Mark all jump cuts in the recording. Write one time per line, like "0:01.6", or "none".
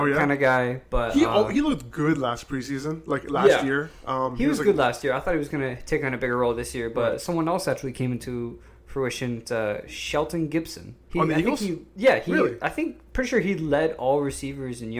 0:11.1